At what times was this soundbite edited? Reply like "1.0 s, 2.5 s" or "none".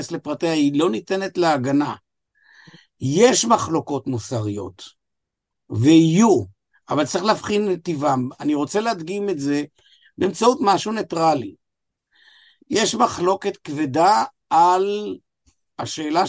none